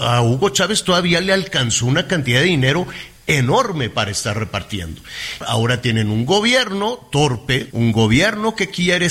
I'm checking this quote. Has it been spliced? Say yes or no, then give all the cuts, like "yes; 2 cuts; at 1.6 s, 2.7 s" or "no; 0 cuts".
yes; 2 cuts; at 5.4 s, 7.7 s